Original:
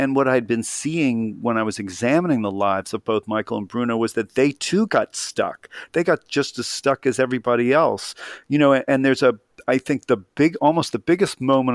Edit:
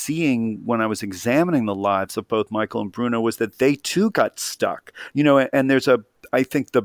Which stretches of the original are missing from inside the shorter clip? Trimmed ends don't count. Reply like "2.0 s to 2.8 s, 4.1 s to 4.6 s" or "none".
5.9 s to 8.4 s